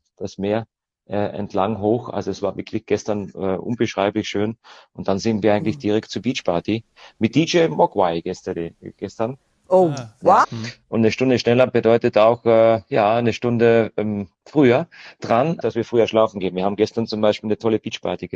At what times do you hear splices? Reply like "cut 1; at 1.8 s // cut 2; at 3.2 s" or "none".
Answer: cut 1; at 10.4 s // cut 2; at 15.6 s